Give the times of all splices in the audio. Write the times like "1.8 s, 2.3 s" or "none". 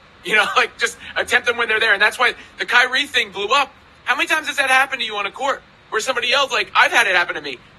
none